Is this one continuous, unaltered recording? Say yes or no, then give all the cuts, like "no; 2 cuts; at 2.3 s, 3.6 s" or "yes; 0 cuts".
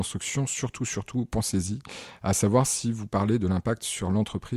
yes; 0 cuts